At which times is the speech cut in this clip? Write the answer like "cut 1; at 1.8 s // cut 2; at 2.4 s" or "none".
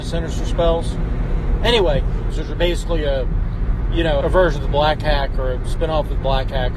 cut 1; at 2.3 s // cut 2; at 4.2 s